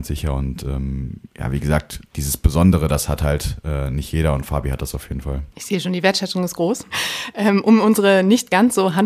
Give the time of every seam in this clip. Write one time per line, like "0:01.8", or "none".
0:05.5
0:06.9